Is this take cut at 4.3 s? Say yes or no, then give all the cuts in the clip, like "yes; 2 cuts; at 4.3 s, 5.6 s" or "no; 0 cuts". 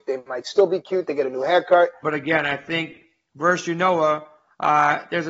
no; 1 cut; at 2.0 s